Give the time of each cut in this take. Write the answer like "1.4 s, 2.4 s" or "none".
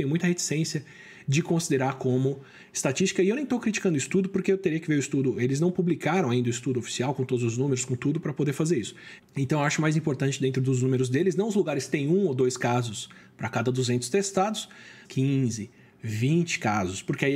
9.2 s, 15.0 s